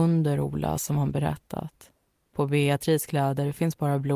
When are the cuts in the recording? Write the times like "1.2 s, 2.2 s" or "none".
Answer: none